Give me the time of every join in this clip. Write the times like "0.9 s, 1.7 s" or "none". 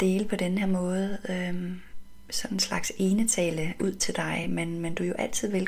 none